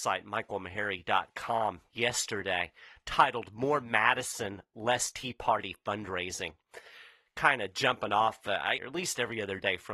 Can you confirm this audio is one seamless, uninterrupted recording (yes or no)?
no